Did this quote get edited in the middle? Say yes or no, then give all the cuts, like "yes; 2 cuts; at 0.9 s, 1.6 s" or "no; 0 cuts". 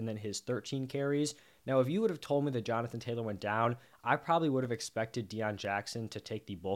no; 0 cuts